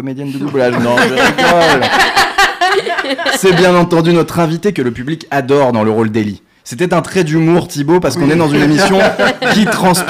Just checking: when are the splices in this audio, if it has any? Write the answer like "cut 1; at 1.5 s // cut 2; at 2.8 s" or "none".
none